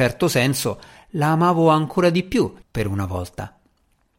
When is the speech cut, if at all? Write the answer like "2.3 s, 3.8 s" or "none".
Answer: 2.6 s